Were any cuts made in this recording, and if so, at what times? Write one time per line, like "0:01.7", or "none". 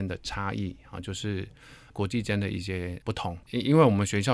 0:03.4